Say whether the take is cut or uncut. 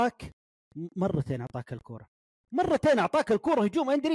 uncut